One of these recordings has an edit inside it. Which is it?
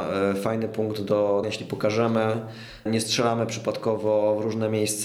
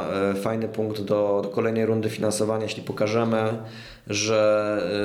first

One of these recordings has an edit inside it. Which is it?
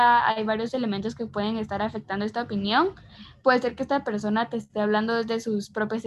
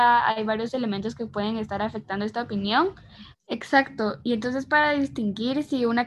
second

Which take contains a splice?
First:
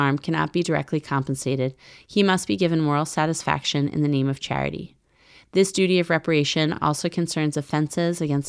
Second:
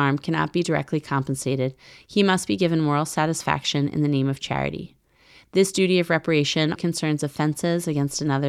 second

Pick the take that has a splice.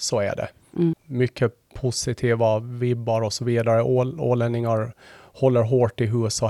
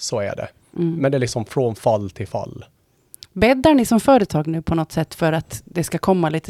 first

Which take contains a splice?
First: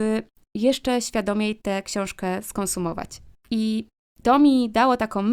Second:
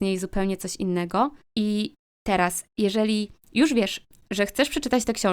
second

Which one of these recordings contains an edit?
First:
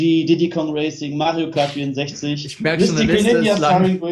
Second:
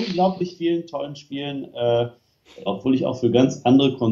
second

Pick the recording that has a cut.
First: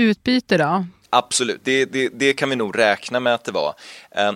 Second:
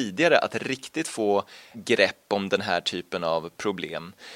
first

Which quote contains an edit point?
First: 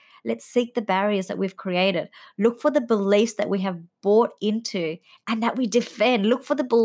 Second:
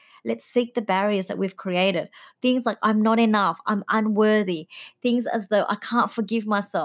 second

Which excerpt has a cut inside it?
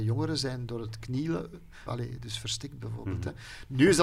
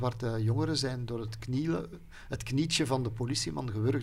first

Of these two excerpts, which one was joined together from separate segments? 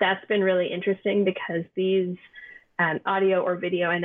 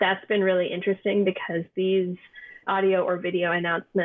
second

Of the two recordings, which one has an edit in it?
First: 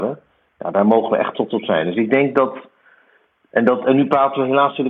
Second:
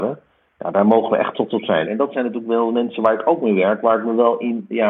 second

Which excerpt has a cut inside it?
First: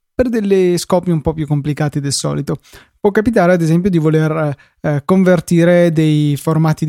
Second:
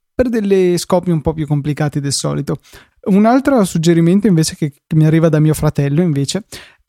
second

